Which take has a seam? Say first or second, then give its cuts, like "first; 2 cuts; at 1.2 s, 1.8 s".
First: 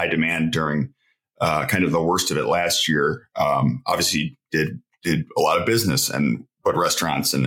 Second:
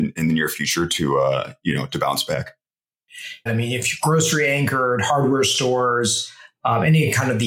second; 1 cut; at 3.5 s